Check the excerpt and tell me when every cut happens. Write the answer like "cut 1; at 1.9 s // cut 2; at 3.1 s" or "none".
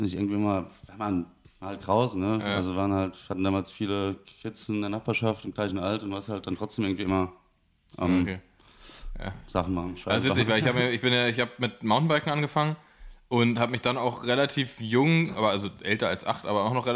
none